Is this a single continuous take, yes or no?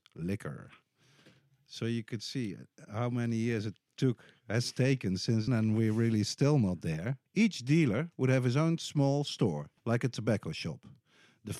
no